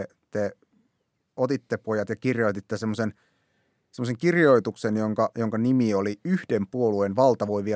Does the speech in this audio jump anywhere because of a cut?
no; 0 cuts

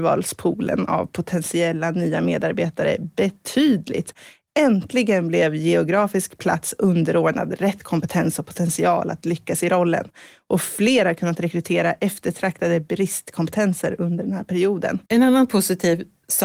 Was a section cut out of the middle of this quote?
yes; 1 cut; at 15.1 s

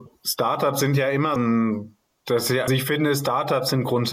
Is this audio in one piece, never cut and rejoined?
no; 2 cuts; at 1.4 s, 2.7 s

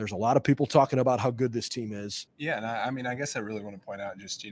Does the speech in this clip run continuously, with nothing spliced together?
no; 1 cut; at 2.3 s

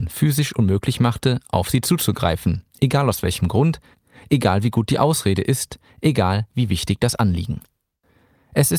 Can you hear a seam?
no; 0 cuts

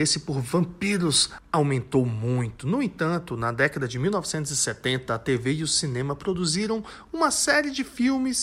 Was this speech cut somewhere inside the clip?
no; 0 cuts

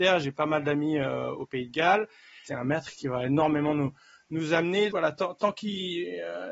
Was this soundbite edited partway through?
yes; 2 cuts; at 2.5 s, 4.9 s

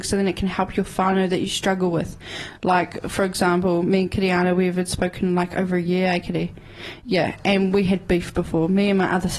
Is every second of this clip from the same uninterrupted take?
yes; 0 cuts

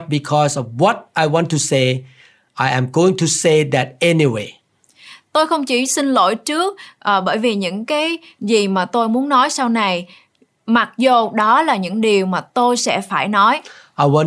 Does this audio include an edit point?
no; 0 cuts

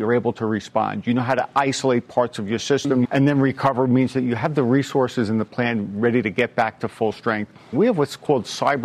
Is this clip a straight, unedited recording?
no; 2 cuts; at 3.0 s, 7.7 s

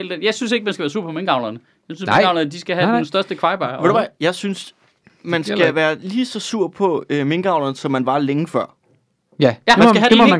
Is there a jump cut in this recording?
no; 0 cuts

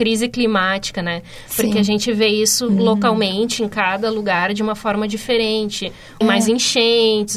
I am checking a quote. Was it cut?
yes; 1 cut; at 6.2 s

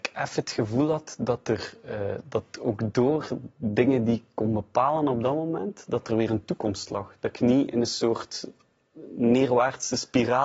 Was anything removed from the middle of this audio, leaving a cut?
no; 0 cuts

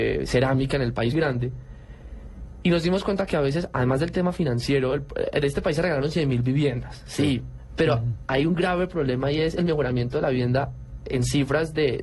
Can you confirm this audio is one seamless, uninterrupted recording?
no; 1 cut; at 1.1 s

